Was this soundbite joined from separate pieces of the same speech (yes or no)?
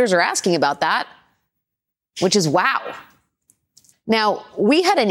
yes